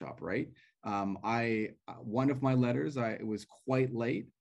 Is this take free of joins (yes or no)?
yes